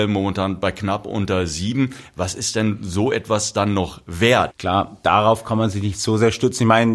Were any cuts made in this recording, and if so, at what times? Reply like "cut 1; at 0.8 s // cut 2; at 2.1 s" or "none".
cut 1; at 4.5 s